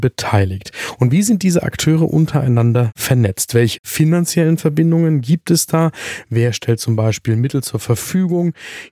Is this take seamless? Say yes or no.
yes